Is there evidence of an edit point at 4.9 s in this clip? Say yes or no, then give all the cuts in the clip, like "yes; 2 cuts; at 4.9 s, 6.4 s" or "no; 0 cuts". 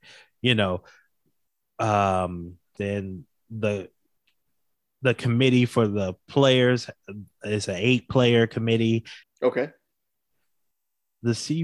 no; 2 cuts; at 2.8 s, 9.2 s